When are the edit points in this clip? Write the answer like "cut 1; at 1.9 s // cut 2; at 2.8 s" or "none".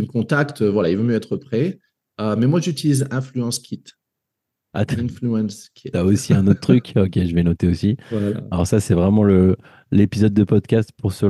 none